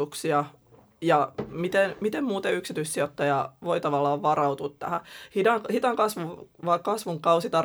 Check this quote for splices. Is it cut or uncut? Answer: uncut